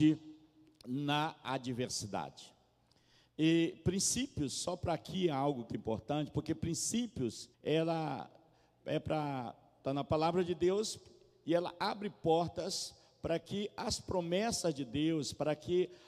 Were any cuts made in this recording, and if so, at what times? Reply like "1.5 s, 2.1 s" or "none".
5.7 s, 7.5 s